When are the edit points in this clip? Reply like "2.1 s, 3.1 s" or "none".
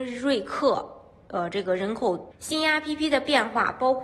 2.3 s